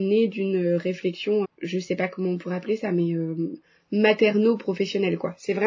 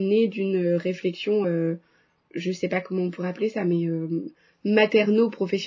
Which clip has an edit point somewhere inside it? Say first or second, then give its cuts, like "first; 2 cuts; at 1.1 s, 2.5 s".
first; 1 cut; at 1.4 s